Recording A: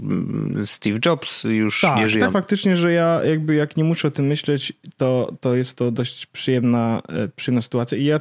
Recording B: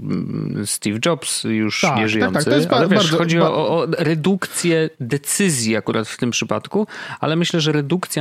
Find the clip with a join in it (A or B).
A